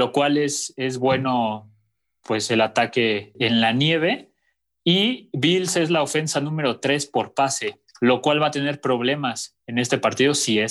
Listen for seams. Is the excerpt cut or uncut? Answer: cut